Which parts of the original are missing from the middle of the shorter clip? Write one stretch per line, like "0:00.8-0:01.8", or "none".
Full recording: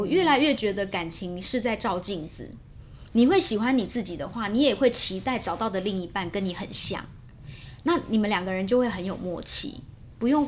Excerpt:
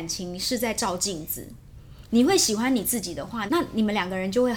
0:04.5-0:07.8